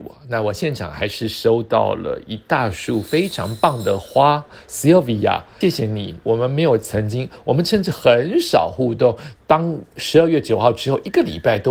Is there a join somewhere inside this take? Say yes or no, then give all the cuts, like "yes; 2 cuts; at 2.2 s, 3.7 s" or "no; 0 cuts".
yes; 2 cuts; at 5.6 s, 9.4 s